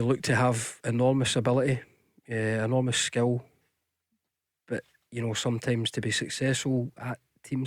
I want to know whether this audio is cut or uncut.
uncut